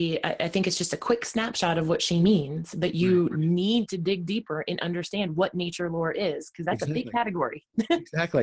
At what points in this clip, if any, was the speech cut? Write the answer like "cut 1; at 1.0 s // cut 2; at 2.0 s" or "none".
none